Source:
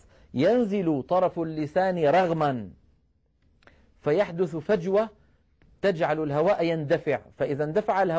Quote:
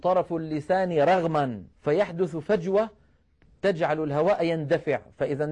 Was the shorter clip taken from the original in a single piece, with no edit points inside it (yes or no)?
no